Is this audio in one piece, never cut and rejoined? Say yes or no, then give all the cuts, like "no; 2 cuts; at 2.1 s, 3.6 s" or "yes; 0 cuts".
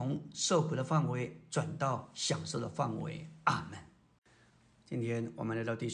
yes; 0 cuts